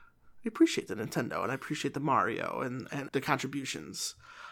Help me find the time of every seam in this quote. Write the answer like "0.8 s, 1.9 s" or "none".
3.1 s